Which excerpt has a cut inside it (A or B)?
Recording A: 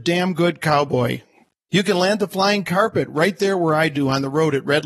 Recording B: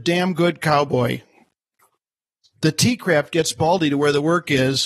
A